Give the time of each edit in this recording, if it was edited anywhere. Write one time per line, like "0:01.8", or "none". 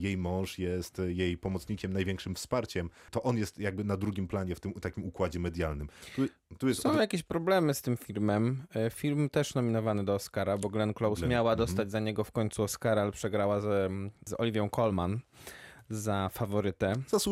none